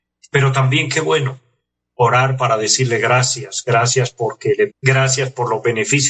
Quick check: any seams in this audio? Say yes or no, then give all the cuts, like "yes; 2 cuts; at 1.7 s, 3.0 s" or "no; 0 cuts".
yes; 1 cut; at 4.7 s